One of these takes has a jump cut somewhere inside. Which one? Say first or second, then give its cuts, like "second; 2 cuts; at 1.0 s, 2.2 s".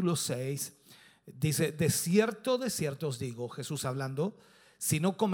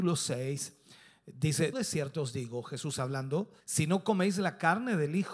second; 2 cuts; at 1.7 s, 3.6 s